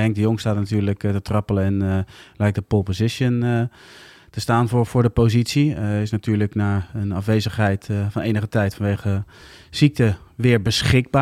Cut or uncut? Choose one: uncut